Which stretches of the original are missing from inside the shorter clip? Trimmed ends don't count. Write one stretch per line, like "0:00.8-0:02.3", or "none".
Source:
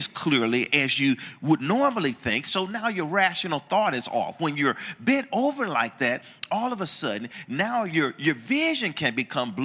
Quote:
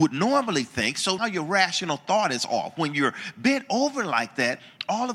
0:02.7-0:02.8